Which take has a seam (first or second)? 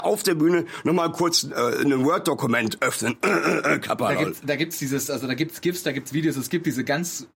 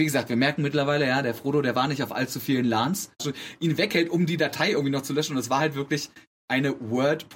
second